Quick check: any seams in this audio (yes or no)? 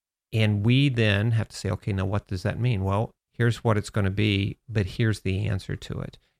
yes